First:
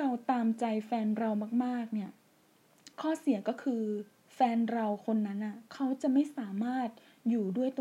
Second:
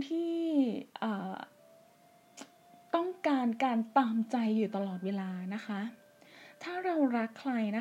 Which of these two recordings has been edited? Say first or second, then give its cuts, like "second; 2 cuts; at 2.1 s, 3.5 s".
first; 1 cut; at 2.9 s